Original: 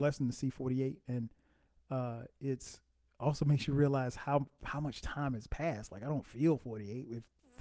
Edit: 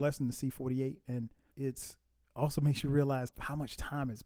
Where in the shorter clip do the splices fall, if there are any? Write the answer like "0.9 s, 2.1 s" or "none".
1.5 s, 3.3 s